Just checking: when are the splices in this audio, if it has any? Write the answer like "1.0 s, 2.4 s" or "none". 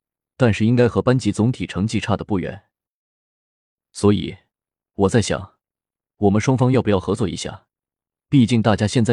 none